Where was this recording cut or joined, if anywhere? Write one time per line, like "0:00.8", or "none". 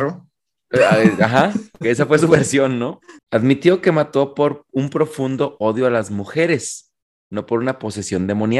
0:03.2